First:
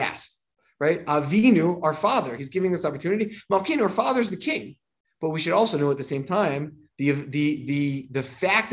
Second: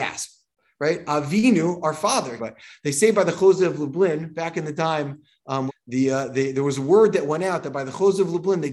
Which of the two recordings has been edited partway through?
second; 2 cuts; at 2.4 s, 5.7 s

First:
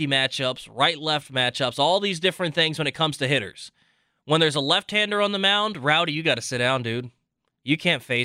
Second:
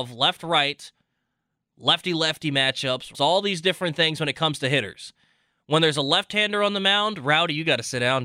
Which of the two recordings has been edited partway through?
second; 1 cut; at 3.1 s

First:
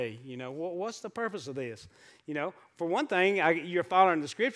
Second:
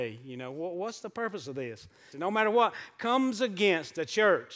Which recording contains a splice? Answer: second; 1 cut; at 2.1 s

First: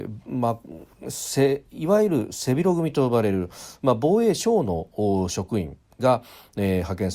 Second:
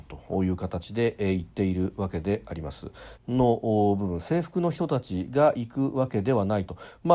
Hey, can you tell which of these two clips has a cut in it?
second; 1 cut; at 3.2 s

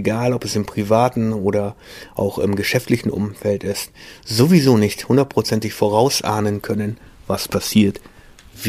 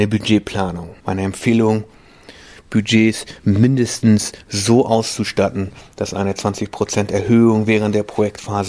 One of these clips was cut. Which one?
second; 1 cut; at 1.0 s

